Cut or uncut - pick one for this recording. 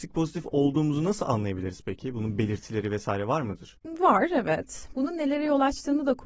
cut